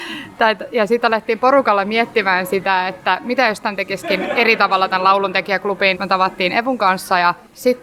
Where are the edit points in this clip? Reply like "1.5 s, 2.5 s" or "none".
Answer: 5.9 s